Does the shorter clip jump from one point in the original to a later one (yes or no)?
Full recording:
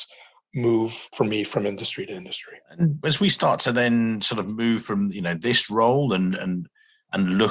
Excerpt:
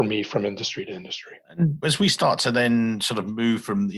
no